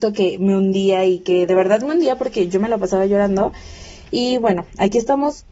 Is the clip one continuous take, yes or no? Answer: yes